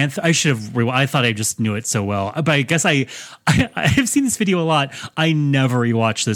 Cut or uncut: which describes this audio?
uncut